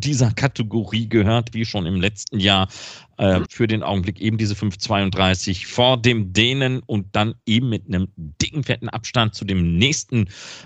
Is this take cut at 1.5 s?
yes; 2 cuts; at 1.5 s, 3.5 s

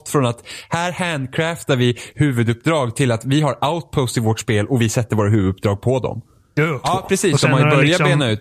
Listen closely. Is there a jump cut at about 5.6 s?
no; 1 cut; at 6.8 s

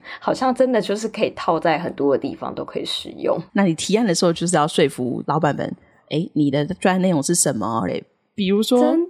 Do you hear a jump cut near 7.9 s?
yes; 2 cuts; at 3.5 s, 7.9 s

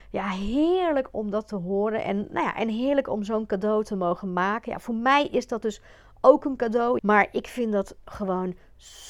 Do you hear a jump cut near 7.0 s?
yes; 1 cut; at 7.0 s

